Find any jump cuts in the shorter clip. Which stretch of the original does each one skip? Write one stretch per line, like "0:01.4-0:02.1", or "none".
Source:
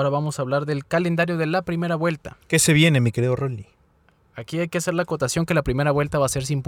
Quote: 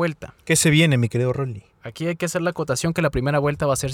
0:03.7-0:04.2